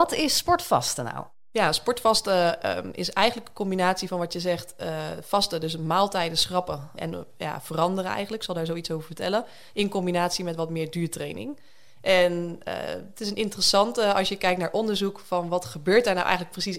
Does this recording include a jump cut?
yes; 1 cut; at 7.0 s

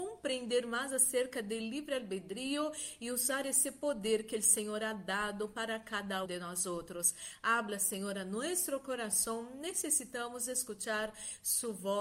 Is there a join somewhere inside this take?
yes; 1 cut; at 6.2 s

